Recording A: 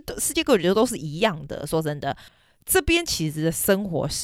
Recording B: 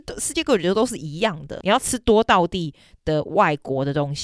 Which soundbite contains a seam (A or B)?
B